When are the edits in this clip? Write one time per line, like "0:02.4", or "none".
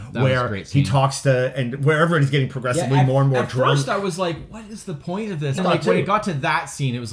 0:05.6